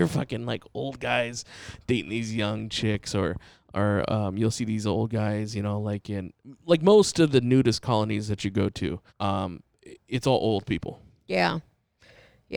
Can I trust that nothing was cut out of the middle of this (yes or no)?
no